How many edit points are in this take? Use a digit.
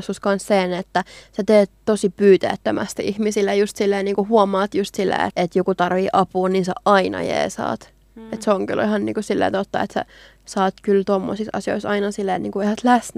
1